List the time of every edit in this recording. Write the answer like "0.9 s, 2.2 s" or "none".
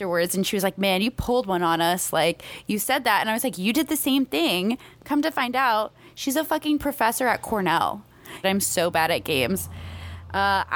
8.4 s